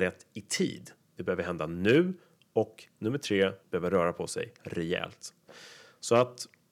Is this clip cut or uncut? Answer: cut